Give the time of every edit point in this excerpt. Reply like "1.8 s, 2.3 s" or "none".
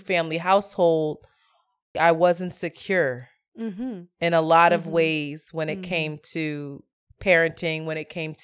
1.9 s